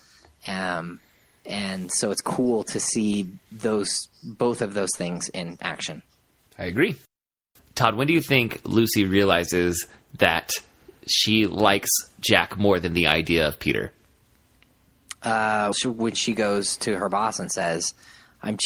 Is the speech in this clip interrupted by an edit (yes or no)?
yes